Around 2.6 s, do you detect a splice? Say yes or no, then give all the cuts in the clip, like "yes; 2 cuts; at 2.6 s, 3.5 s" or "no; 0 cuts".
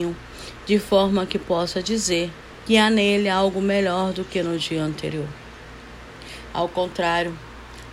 yes; 2 cuts; at 2.6 s, 6.5 s